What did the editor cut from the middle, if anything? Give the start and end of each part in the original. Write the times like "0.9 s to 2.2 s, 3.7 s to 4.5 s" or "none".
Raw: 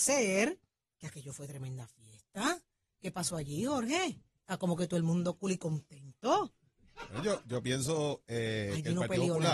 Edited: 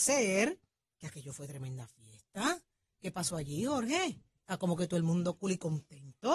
none